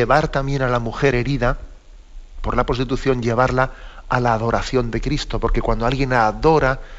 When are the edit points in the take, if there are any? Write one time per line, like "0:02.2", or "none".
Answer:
none